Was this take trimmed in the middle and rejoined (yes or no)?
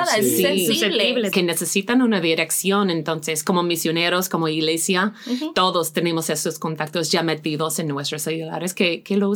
yes